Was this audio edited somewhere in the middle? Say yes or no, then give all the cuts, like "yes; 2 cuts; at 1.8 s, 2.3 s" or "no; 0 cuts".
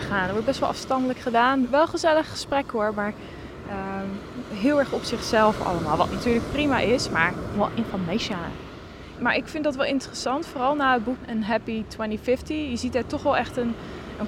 yes; 2 cuts; at 7.5 s, 9.1 s